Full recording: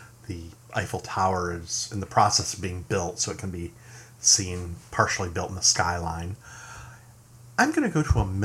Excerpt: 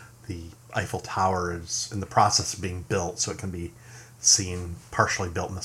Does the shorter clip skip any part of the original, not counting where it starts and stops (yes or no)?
no